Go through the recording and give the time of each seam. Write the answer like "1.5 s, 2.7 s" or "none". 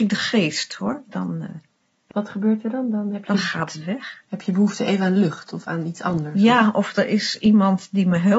2.1 s